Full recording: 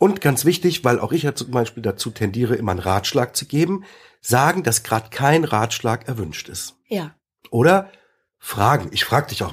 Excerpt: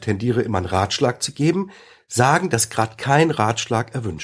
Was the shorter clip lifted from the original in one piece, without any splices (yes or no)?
yes